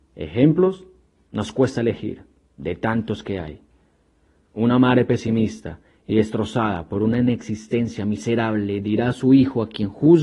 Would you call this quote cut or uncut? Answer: uncut